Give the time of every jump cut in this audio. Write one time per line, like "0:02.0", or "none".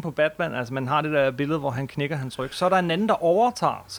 none